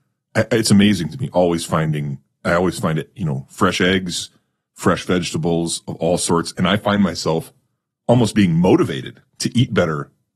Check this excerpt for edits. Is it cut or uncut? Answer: uncut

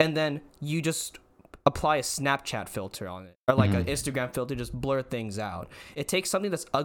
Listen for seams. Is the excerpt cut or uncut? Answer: uncut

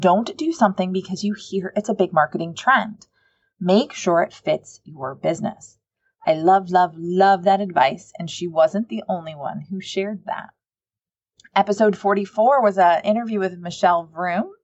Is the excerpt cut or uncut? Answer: uncut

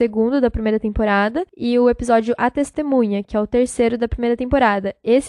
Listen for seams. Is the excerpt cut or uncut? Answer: uncut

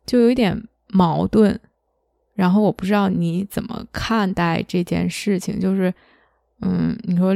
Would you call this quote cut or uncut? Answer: uncut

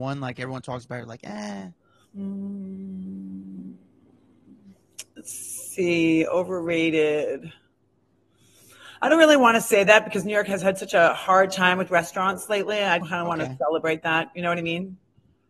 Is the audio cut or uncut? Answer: cut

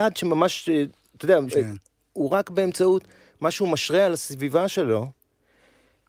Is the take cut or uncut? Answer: cut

